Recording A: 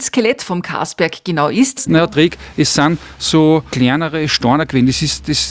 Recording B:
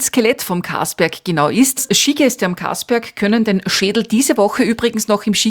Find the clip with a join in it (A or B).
A